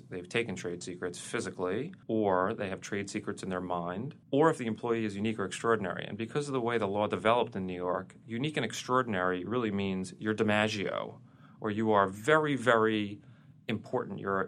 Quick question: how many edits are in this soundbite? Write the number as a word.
two